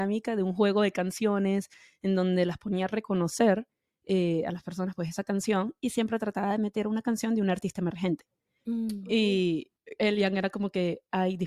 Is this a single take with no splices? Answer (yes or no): yes